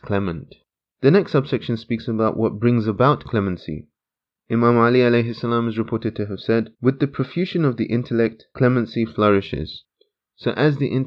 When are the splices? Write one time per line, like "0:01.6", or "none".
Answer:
0:01.0
0:06.7